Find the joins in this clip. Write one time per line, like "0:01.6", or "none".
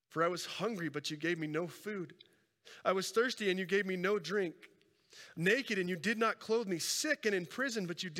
0:05.3